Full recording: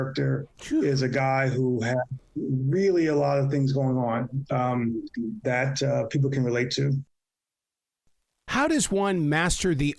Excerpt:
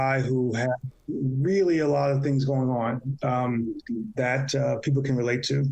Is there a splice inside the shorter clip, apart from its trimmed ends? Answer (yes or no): no